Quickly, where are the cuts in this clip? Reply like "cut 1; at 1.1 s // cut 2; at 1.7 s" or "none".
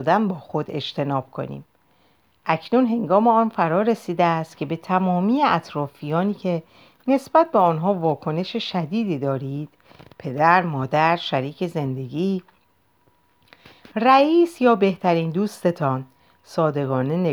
none